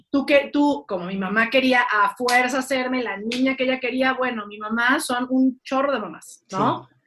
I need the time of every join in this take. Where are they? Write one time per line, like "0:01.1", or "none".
none